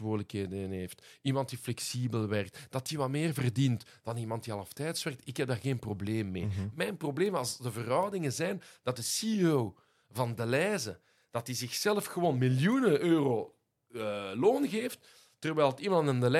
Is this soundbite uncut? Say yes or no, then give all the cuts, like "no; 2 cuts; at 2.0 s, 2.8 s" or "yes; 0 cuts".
yes; 0 cuts